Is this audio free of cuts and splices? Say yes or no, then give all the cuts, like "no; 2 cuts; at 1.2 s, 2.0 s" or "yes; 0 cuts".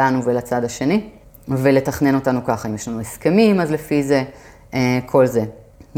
yes; 0 cuts